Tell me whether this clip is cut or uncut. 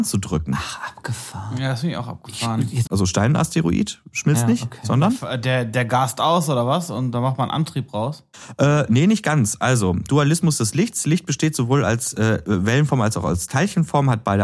cut